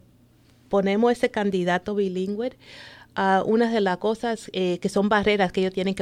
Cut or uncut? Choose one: uncut